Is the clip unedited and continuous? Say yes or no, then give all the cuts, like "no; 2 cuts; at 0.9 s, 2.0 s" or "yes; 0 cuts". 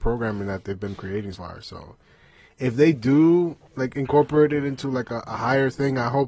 no; 1 cut; at 1.3 s